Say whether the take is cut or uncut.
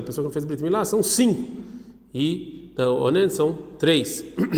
uncut